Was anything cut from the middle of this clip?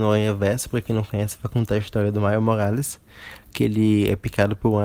no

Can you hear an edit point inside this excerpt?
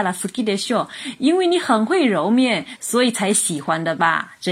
no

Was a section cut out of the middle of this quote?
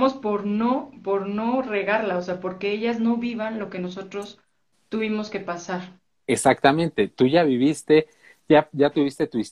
no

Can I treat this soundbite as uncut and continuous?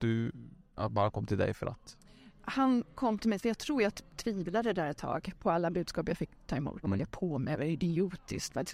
no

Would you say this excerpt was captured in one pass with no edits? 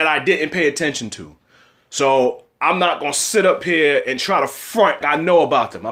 no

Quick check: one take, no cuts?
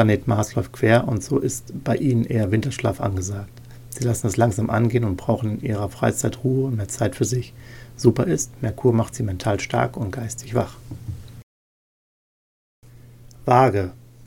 yes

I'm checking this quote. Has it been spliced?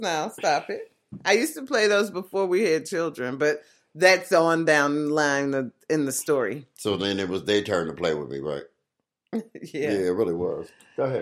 no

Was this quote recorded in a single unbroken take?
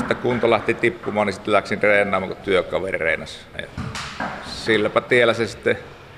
no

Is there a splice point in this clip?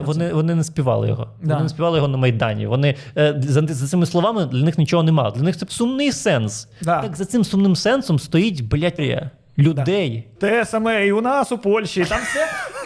yes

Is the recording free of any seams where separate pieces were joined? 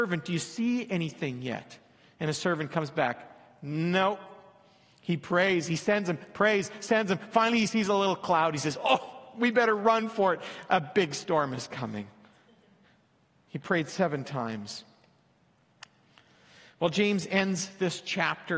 yes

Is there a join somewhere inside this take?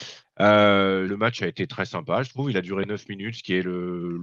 yes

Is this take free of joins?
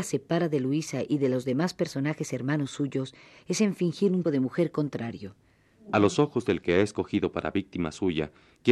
no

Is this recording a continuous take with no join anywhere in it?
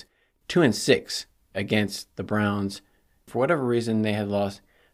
no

